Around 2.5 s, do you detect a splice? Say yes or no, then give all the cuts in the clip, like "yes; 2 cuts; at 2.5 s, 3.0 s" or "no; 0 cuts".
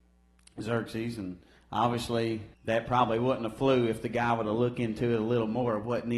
yes; 1 cut; at 2.5 s